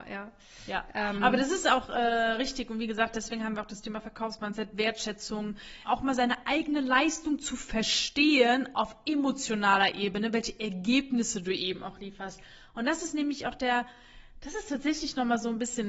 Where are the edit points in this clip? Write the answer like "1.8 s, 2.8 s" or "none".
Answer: 5.8 s